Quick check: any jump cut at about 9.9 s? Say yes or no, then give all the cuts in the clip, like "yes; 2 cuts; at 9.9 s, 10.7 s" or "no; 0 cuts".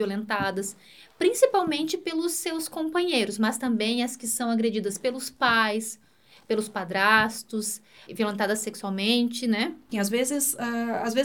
yes; 2 cuts; at 8.1 s, 9.9 s